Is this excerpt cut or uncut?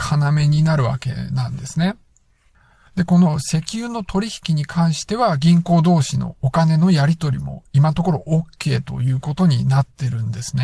cut